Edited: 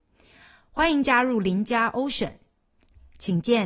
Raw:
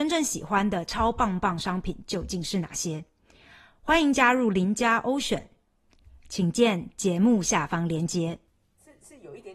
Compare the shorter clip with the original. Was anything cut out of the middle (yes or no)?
no